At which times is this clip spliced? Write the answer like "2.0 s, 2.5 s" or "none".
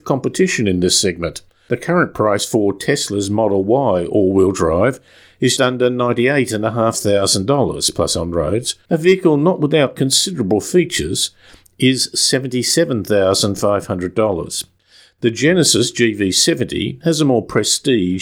5.6 s, 8.9 s